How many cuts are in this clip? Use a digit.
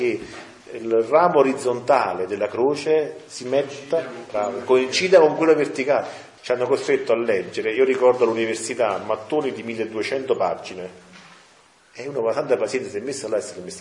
1